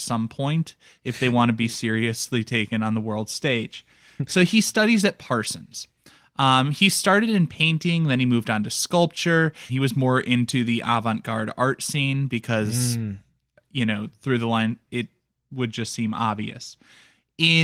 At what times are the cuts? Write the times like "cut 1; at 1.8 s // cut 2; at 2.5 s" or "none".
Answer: cut 1; at 9.7 s // cut 2; at 14.9 s